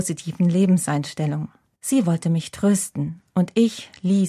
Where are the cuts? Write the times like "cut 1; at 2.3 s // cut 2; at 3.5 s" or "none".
cut 1; at 1.7 s